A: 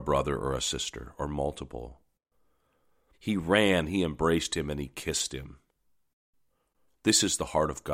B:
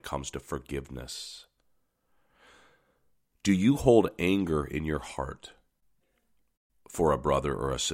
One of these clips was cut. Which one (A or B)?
A